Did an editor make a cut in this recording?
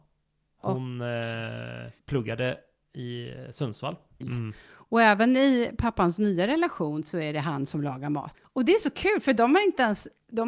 yes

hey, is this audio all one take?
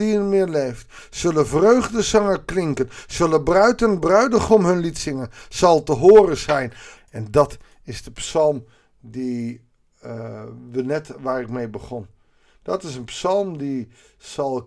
no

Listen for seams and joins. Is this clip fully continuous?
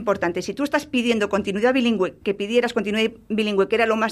no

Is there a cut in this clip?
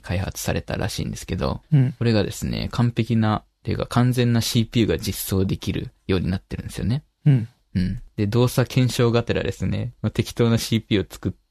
no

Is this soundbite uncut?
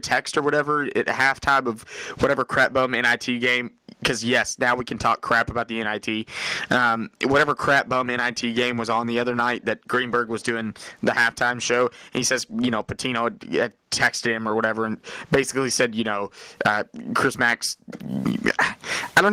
yes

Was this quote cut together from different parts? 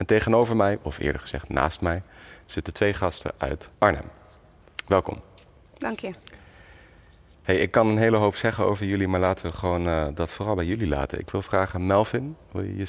yes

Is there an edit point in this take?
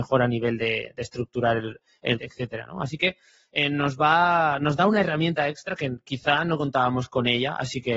yes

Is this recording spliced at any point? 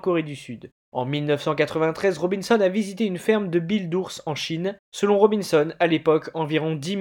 no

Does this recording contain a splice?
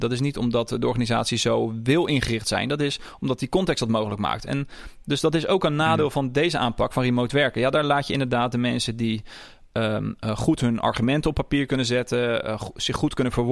no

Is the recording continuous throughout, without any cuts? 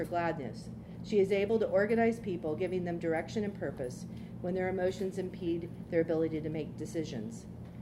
yes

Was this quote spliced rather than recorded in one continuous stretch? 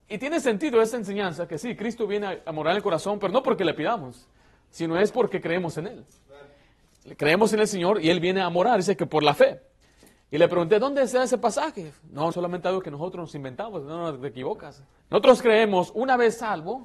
yes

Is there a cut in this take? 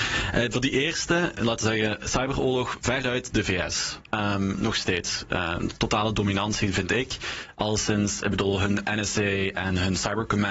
yes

